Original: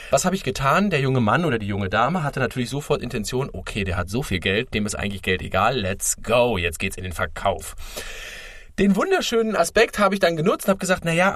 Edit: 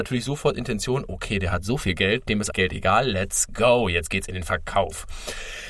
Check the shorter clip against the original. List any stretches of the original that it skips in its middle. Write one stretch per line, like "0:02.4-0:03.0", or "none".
0:05.0-0:05.2